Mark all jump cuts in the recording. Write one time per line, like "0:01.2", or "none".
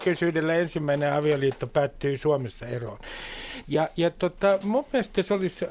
0:03.6